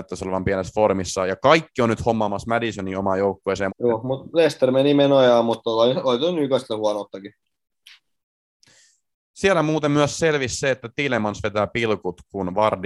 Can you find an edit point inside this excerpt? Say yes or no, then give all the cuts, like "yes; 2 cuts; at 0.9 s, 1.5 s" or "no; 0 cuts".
yes; 1 cut; at 3.7 s